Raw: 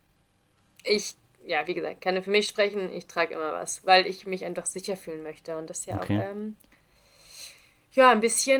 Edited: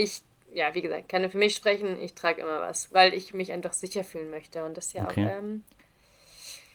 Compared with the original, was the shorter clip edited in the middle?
no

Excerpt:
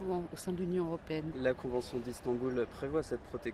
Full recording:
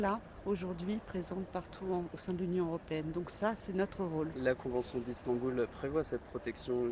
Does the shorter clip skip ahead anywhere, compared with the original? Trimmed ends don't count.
yes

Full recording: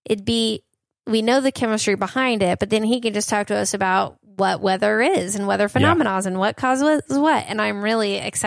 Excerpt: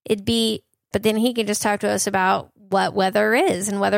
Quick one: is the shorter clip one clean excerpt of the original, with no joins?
no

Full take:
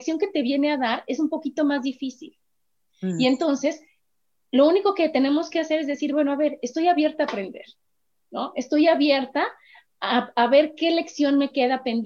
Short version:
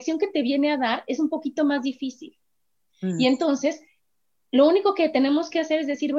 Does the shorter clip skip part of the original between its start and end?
no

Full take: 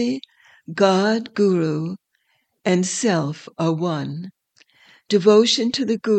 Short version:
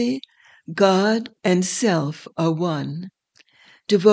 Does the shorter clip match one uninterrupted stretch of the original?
no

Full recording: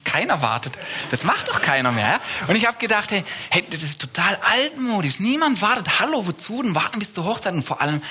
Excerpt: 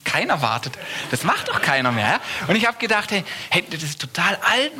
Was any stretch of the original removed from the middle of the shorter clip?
no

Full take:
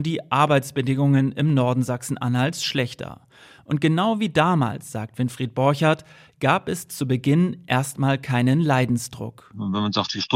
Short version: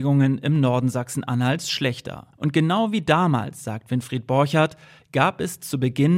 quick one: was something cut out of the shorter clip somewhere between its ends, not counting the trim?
yes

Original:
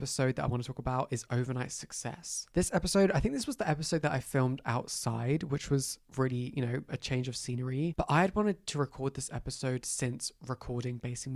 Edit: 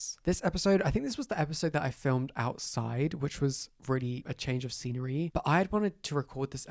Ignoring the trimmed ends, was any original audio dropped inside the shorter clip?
yes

